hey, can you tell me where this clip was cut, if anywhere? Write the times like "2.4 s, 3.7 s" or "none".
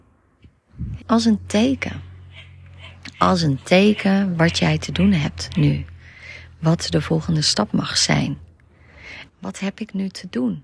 1.0 s, 9.3 s